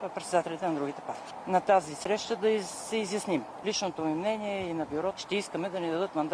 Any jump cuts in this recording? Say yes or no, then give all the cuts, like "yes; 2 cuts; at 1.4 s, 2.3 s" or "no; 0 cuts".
yes; 2 cuts; at 3.6 s, 5.2 s